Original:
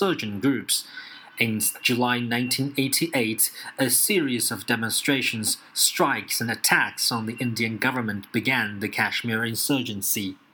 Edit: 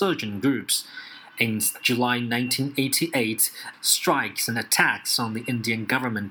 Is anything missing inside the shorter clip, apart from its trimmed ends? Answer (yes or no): yes